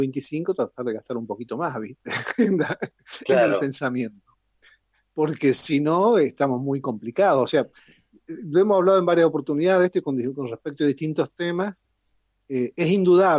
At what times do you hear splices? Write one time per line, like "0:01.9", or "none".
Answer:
none

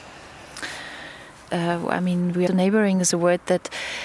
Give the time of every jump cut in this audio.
0:01.5
0:02.5

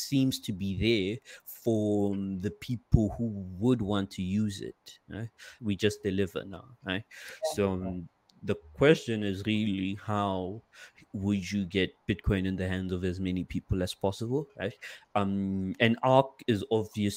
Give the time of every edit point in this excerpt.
0:05.6

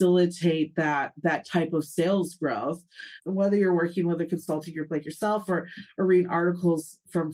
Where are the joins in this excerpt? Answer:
0:03.2

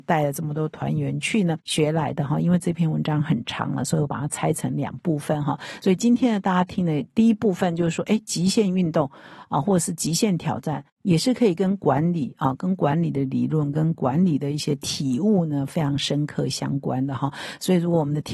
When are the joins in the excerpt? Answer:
none

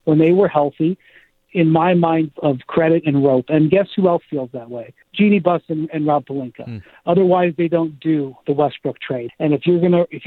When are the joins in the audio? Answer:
0:02.3
0:05.0
0:09.3

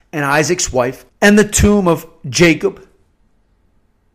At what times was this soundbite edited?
0:01.1

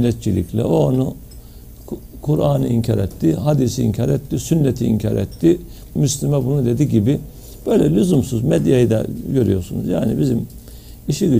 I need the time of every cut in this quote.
0:05.9

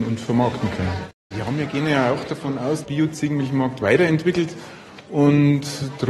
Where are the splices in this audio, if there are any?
0:01.3
0:02.8

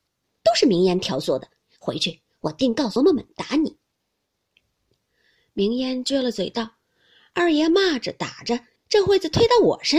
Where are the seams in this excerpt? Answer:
0:03.0
0:08.8

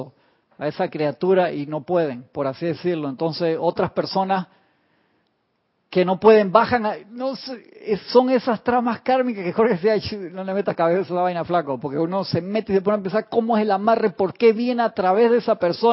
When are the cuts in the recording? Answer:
none

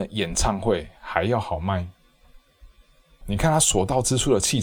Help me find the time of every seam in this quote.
0:03.2

